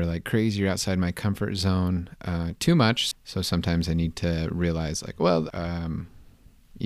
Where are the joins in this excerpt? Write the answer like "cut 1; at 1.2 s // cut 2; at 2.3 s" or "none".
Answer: cut 1; at 3.1 s // cut 2; at 5.5 s